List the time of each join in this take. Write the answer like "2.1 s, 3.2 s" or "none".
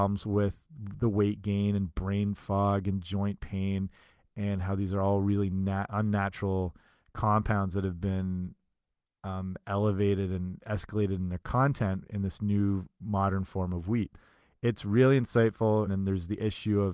15.9 s